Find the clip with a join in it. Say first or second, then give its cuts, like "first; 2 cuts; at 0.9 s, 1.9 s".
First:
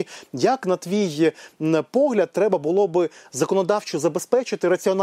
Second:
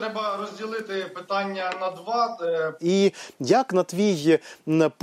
second; 1 cut; at 2.8 s